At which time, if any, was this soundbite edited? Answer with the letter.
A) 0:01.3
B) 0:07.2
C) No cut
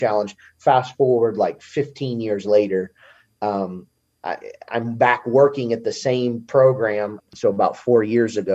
B